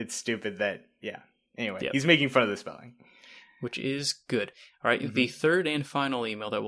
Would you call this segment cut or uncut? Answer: uncut